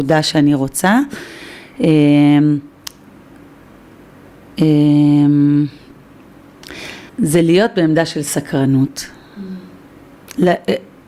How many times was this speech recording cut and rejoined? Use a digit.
1